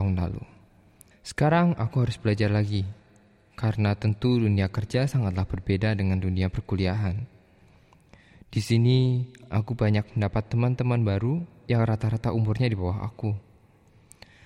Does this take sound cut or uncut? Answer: cut